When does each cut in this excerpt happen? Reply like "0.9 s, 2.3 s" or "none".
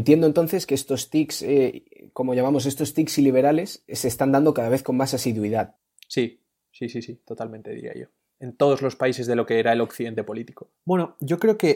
10.7 s